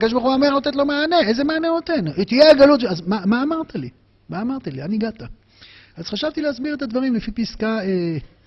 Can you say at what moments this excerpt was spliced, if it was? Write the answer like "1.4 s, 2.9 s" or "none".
none